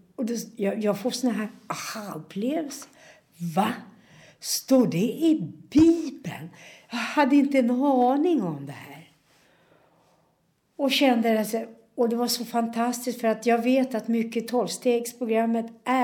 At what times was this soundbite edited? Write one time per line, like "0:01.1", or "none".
none